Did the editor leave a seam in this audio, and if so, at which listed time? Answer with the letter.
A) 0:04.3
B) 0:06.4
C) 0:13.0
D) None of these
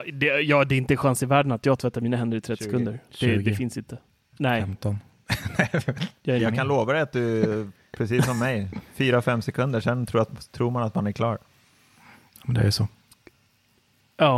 B